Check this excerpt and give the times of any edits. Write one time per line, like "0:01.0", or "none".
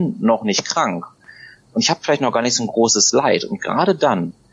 none